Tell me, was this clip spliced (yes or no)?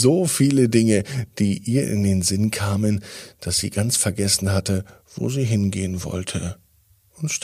no